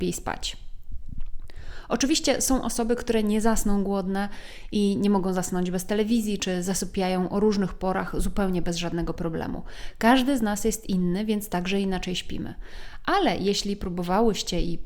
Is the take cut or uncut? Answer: uncut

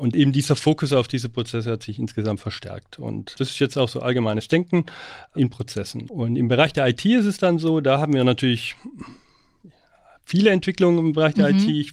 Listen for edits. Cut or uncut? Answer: uncut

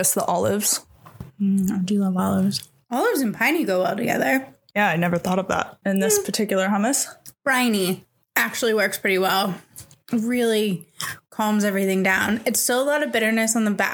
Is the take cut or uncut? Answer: cut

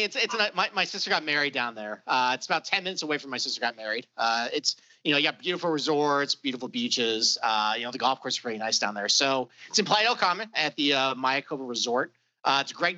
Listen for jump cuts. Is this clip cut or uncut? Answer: uncut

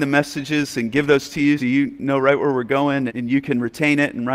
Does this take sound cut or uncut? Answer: cut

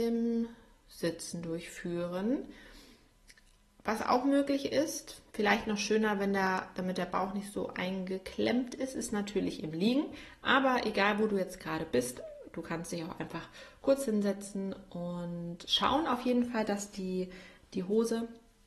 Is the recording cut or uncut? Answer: uncut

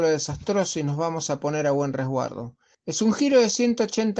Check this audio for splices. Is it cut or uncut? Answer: cut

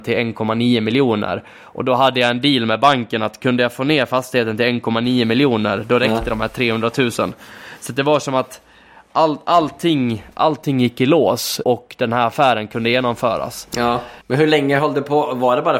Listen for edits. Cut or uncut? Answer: cut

